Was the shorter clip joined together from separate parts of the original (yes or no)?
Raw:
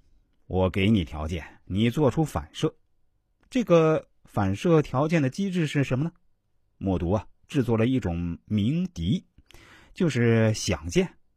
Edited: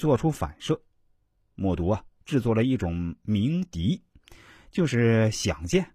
yes